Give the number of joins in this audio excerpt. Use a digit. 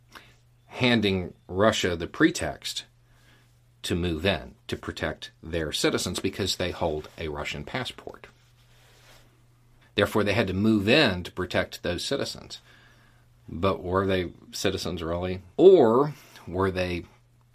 2